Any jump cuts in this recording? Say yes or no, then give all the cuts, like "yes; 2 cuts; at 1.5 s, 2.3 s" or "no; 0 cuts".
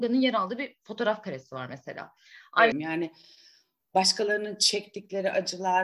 yes; 1 cut; at 2.7 s